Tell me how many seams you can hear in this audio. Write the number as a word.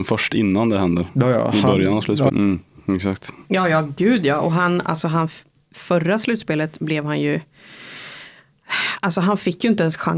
one